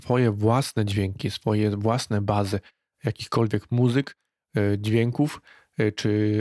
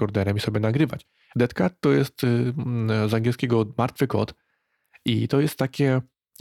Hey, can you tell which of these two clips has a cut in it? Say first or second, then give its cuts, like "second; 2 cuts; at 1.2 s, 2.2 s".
second; 1 cut; at 1.3 s